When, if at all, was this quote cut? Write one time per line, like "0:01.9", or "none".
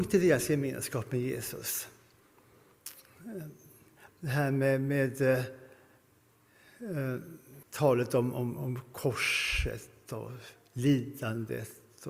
0:04.1
0:07.6

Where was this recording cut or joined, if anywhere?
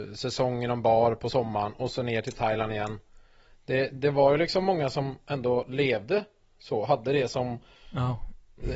0:07.7

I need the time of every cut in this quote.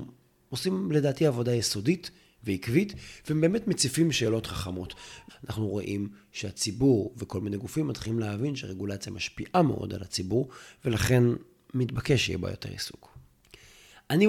0:05.3

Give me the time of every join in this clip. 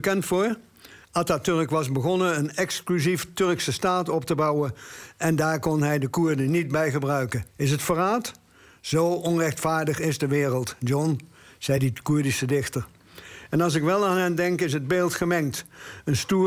0:07.5
0:13.5

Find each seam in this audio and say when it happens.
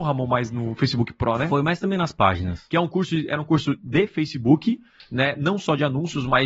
none

